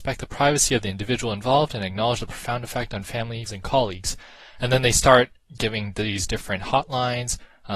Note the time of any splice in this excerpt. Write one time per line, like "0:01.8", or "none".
0:03.5